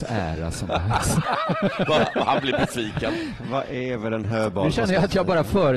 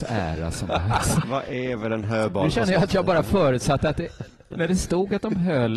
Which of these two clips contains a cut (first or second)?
second